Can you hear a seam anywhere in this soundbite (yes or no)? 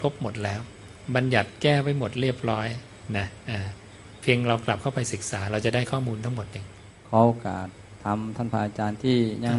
no